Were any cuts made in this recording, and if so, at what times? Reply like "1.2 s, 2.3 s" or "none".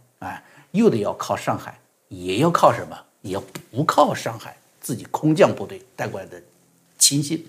none